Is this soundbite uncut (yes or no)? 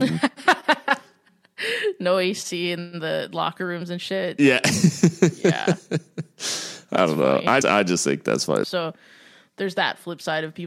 no